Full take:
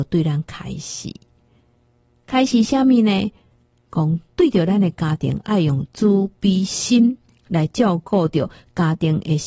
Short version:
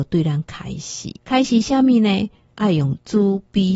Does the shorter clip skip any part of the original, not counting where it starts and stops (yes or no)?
yes